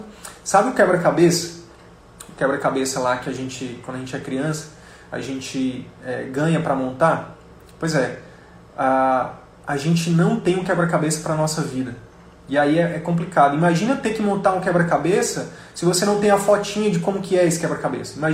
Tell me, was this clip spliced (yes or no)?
no